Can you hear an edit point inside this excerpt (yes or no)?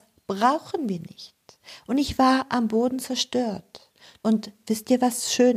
yes